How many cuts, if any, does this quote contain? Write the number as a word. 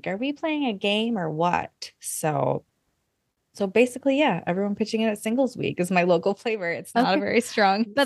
zero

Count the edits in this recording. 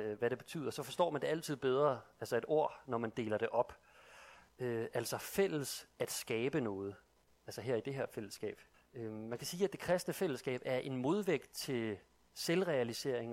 two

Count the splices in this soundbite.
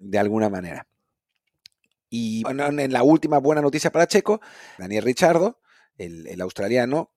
two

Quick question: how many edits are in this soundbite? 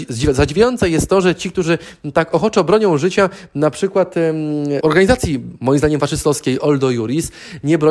one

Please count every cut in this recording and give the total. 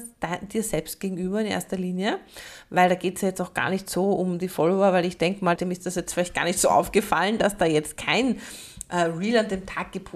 one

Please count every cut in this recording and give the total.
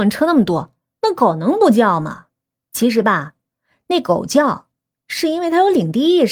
one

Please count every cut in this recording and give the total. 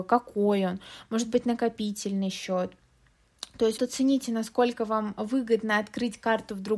one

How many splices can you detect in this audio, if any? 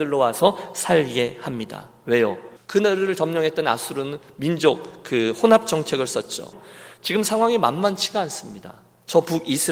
two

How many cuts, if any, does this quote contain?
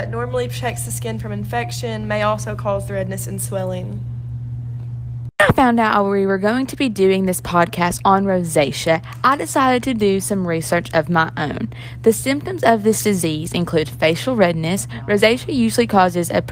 zero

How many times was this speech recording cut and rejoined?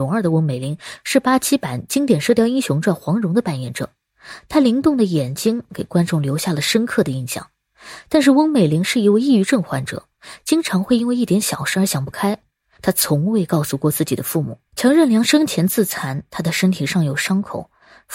three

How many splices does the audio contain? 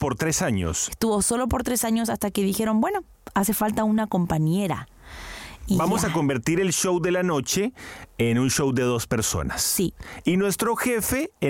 zero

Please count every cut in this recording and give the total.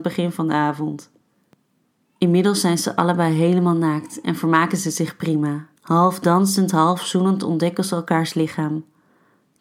one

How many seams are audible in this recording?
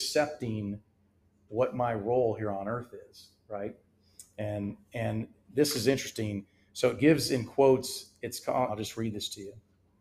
one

